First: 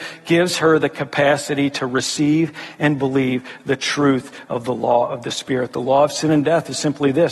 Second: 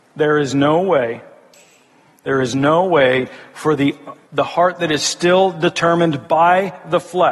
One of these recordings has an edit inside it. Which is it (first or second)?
second